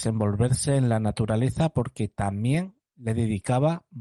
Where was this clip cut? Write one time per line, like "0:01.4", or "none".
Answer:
none